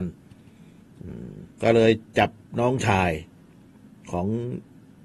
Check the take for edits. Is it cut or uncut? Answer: cut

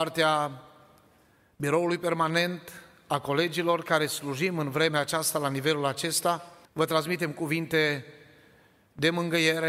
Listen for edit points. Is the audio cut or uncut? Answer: cut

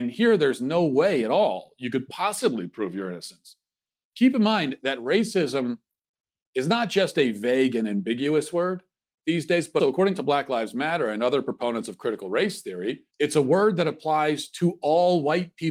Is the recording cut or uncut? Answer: cut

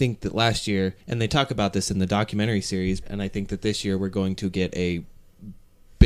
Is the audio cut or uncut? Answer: cut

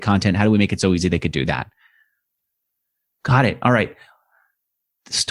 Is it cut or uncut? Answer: uncut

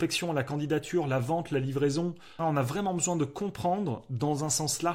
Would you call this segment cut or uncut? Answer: cut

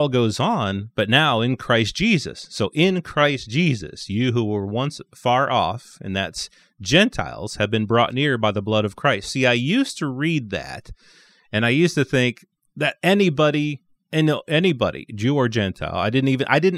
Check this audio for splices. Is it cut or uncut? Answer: uncut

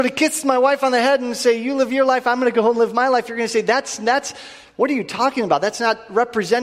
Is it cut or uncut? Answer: uncut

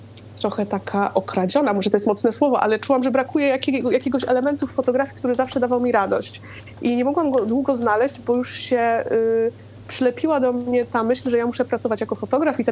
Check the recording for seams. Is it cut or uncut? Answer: uncut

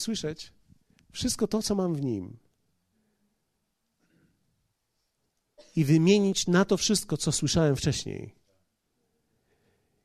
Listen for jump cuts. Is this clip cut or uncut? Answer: uncut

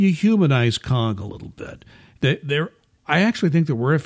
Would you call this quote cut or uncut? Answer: cut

